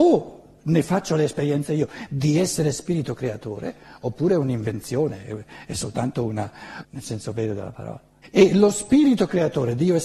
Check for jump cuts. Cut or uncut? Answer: cut